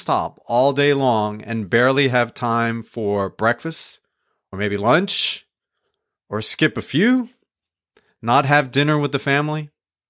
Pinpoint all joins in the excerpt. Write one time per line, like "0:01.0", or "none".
none

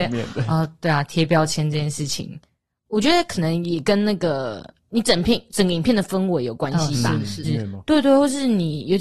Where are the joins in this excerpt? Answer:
0:07.4

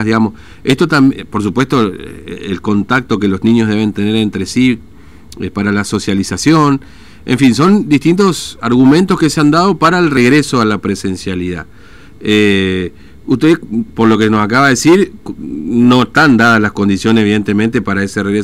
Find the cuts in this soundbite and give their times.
none

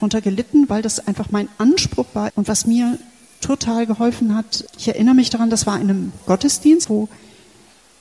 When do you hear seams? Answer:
0:02.3
0:04.7
0:06.8

